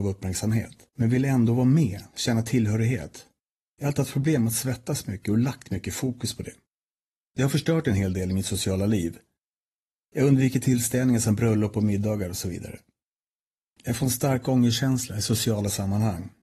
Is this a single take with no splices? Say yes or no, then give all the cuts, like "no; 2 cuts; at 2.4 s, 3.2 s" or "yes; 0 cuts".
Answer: yes; 0 cuts